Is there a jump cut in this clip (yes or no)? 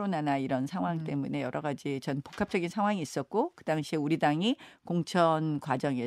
no